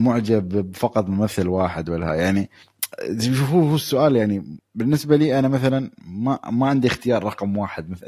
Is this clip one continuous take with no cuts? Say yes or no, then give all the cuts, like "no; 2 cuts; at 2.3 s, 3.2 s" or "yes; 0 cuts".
yes; 0 cuts